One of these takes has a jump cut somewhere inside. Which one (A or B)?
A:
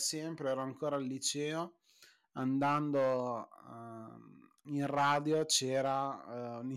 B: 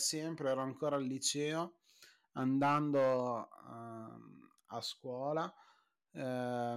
A